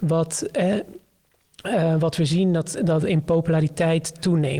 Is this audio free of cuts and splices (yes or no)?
yes